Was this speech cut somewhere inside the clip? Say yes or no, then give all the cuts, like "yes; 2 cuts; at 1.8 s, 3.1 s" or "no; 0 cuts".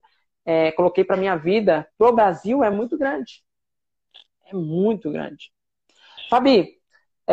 no; 0 cuts